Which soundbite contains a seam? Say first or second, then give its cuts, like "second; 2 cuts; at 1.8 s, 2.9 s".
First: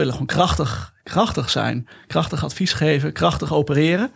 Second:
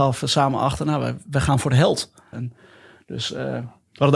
second; 1 cut; at 2.3 s